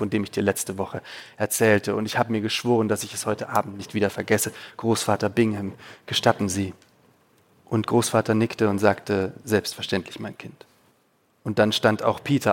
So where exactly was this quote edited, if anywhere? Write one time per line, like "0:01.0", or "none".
none